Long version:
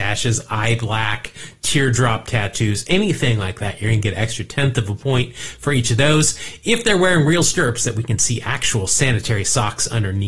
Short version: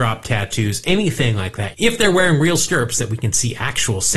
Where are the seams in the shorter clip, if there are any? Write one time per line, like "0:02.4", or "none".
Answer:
0:01.7